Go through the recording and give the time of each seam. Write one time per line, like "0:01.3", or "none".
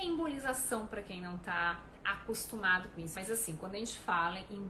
0:03.1